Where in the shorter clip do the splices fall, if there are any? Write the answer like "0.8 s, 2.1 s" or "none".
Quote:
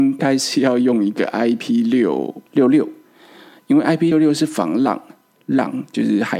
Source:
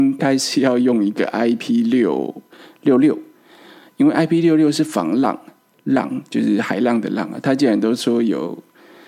2.5 s, 4.1 s